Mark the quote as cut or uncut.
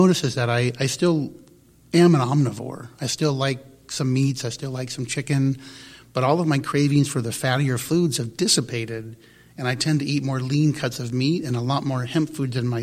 uncut